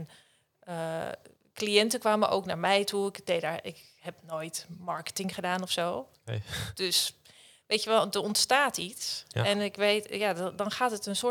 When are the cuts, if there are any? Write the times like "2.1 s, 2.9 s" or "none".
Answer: none